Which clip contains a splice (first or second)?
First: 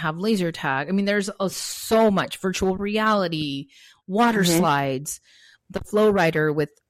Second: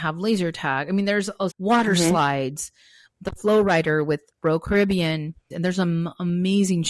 second